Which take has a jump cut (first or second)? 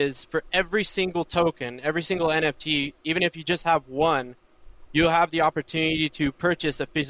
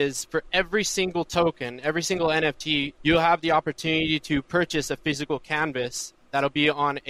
second